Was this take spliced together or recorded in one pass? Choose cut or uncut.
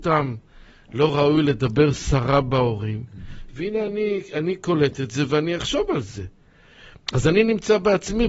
uncut